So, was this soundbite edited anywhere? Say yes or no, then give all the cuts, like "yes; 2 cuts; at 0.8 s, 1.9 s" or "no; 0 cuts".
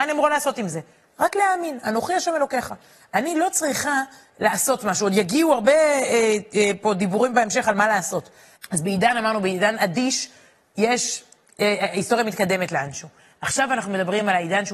yes; 1 cut; at 8.5 s